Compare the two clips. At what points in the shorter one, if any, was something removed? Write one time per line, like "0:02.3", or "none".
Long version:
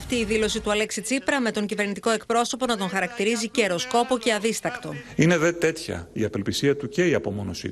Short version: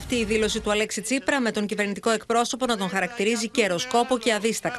none